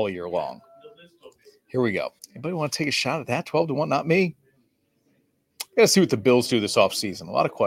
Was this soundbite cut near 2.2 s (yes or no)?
yes